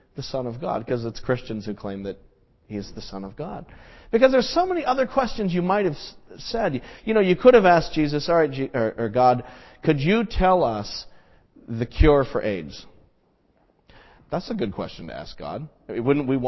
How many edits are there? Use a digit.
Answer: 1